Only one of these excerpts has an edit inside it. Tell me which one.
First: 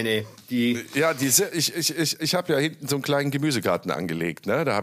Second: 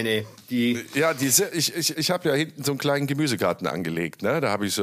second; 1 cut; at 1.9 s

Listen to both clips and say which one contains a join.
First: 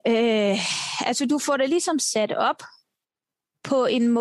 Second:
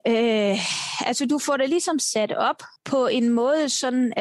second; 1 cut; at 2.8 s

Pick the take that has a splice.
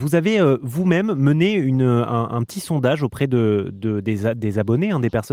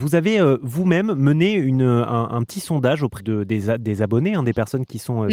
second; 1 cut; at 3.2 s

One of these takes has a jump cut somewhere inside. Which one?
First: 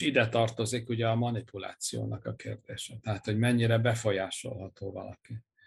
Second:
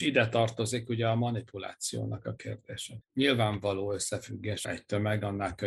second; 2 cuts; at 3.0 s, 4.6 s

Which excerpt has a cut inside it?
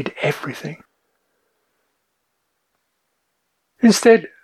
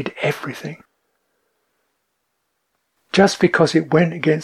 second; 1 cut; at 3.0 s

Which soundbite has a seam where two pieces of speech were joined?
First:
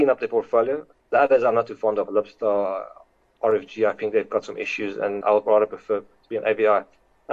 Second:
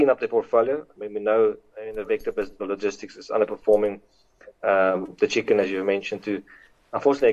first; 2 cuts; at 0.9 s, 5.2 s

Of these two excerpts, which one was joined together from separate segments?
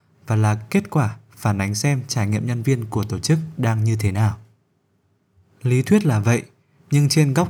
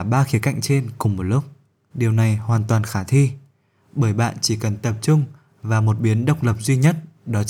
second; 1 cut; at 1.9 s

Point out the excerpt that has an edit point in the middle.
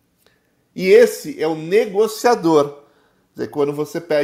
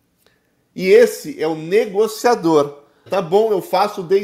second; 1 cut; at 3.1 s

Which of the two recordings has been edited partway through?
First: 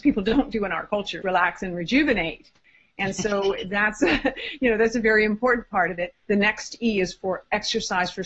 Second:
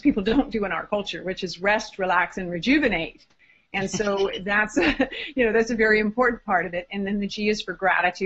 first; 2 cuts; at 1.2 s, 6.1 s

